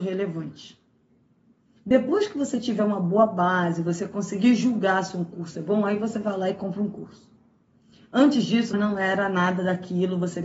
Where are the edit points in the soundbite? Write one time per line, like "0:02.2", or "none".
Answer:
0:01.8
0:08.7